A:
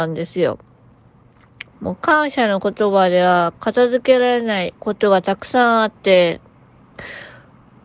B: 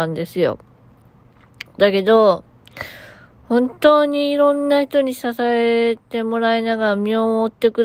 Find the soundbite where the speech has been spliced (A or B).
A